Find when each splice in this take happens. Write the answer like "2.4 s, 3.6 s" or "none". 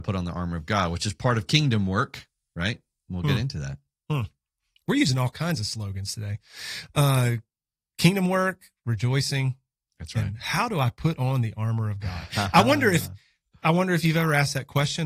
none